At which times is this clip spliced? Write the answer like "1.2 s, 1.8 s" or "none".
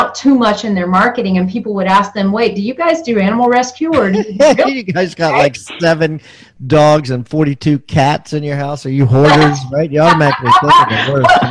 none